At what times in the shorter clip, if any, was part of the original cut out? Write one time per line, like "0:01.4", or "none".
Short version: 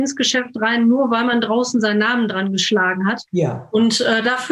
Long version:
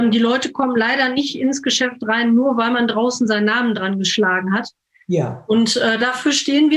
0:03.3